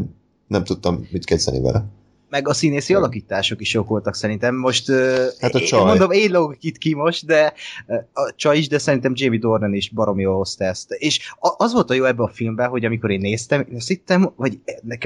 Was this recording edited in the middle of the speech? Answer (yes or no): no